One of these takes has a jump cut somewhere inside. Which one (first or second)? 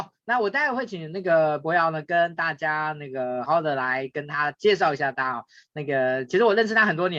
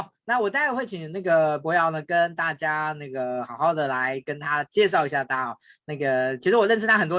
first